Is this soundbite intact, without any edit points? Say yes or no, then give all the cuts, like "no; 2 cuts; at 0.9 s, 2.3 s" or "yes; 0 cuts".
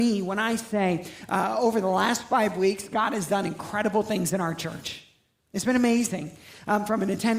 yes; 0 cuts